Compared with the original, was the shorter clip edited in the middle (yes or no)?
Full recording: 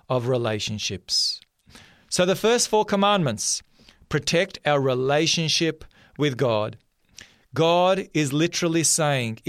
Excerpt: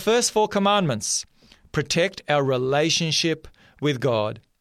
no